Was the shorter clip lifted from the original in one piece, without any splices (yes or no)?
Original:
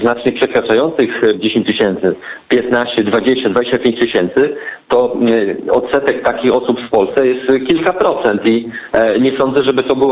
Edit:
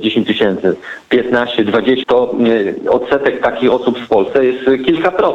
no